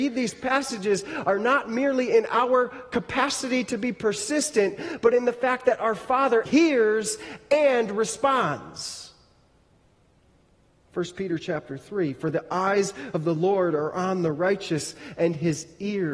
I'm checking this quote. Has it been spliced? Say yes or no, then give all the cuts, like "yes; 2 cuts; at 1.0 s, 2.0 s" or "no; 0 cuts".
yes; 1 cut; at 6.5 s